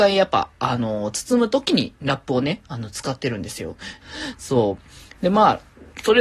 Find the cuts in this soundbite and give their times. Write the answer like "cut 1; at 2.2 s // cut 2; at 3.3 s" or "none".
cut 1; at 4.0 s